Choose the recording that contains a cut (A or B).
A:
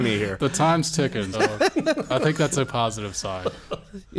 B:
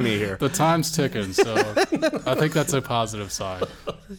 A